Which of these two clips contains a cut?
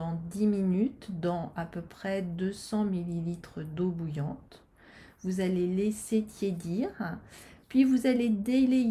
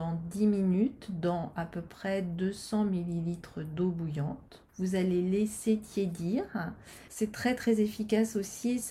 second; 2 cuts; at 4.7 s, 7.1 s

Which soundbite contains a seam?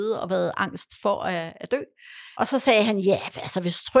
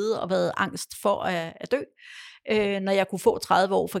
first; 1 cut; at 2.3 s

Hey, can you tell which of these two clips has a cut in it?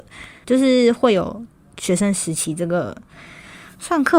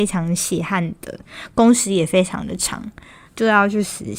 second; 1 cut; at 3.3 s

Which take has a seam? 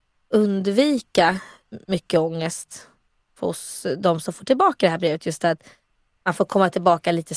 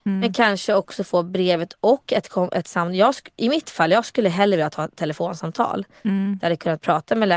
first; 1 cut; at 1.8 s

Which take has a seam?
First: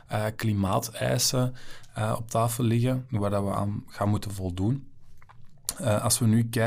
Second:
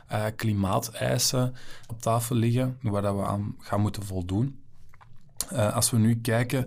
second; 1 cut; at 1.9 s

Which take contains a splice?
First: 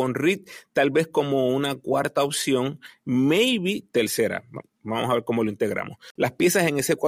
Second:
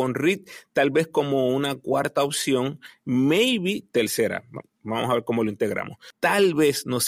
second; 1 cut; at 6.1 s

